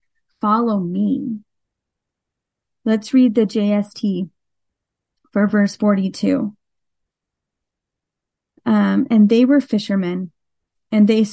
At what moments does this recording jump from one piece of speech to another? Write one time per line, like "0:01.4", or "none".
0:09.1